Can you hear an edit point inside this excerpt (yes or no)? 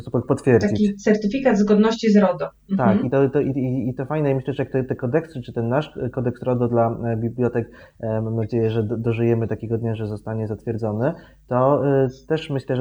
no